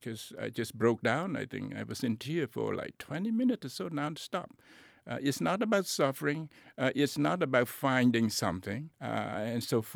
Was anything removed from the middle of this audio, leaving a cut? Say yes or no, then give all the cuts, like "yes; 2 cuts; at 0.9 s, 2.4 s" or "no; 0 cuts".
yes; 1 cut; at 8.9 s